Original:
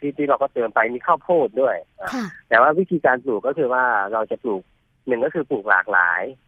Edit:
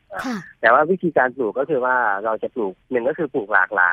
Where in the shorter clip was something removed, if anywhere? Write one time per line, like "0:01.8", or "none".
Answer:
0:02.8